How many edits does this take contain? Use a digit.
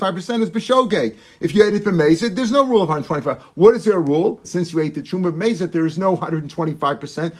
1